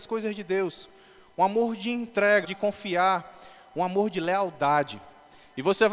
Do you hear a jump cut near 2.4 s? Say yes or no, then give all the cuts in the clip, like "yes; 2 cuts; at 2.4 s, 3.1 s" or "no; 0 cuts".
yes; 1 cut; at 2.4 s